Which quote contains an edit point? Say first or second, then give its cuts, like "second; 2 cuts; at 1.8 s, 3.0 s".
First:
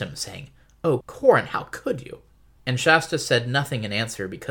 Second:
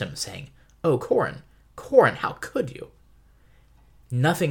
first; 2 cuts; at 1.0 s, 2.6 s